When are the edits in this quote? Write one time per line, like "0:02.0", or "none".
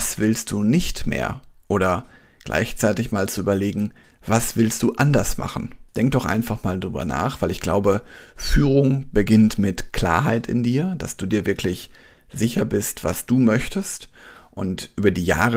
none